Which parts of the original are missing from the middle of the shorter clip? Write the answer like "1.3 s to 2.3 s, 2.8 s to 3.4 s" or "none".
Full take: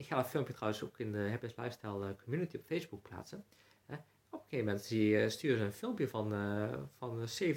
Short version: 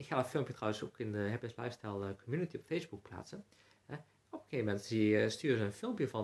none